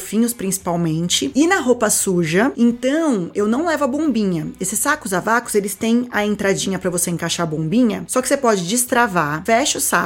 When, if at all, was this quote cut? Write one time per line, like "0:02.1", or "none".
none